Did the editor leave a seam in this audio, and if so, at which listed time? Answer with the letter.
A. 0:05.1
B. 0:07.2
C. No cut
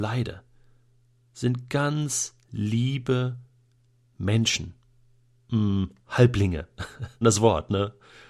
B